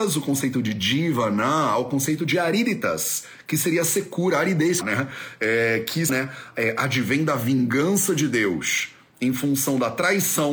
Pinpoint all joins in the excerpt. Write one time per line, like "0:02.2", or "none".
0:04.8
0:06.1